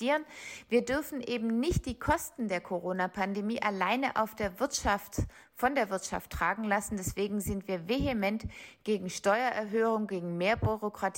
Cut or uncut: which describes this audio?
uncut